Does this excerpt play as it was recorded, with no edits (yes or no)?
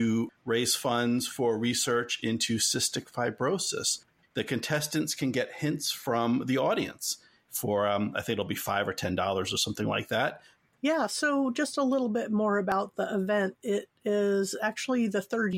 yes